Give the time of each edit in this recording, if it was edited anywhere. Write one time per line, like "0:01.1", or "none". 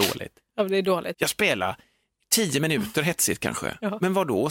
0:01.1